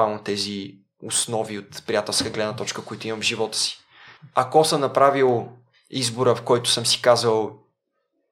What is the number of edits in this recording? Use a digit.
0